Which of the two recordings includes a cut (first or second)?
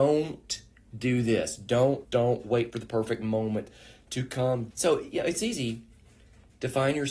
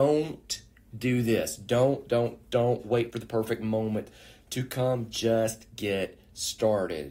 first